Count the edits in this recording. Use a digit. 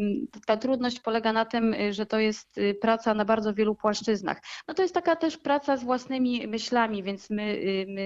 1